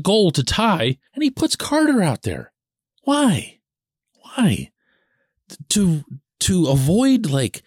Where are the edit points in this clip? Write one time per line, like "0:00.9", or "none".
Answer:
0:01.1

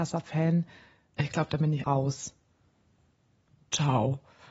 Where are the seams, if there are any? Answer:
0:01.8

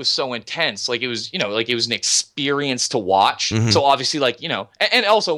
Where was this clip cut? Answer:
none

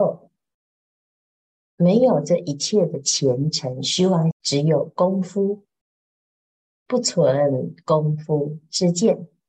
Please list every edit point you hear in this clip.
0:04.3

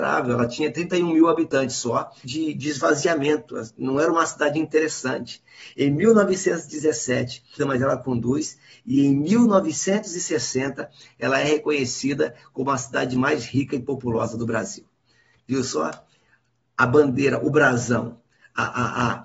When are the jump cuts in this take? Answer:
0:02.2
0:07.6

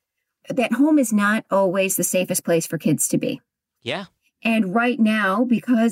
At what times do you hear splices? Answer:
none

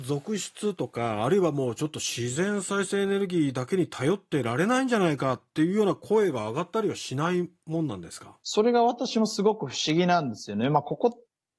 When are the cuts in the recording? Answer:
0:08.4

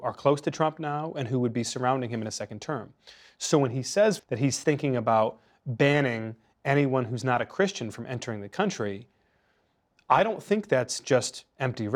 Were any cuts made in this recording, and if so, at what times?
0:04.2

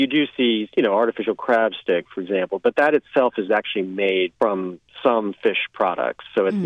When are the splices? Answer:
none

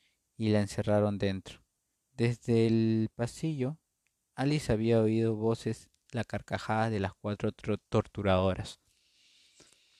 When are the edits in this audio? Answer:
0:01.9
0:06.1
0:07.8

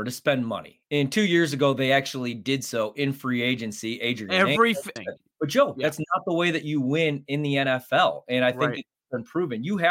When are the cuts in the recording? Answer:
0:05.0

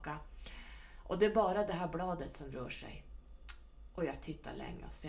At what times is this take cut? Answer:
none

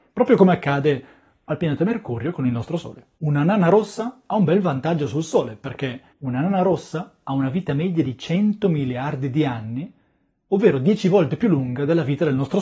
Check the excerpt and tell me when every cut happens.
0:03.2
0:06.1

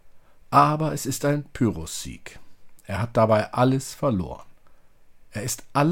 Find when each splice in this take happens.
none

